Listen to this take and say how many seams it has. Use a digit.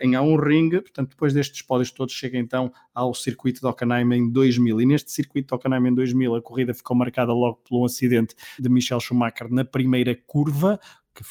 1